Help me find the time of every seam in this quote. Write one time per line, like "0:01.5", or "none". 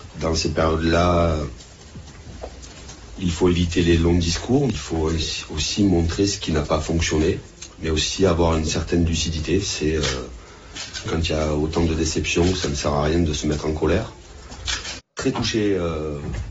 0:11.1
0:15.0